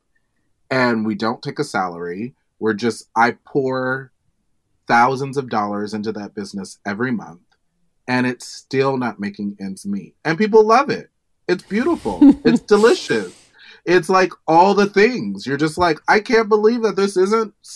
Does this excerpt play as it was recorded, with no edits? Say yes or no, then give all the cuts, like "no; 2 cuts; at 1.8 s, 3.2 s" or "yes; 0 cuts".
yes; 0 cuts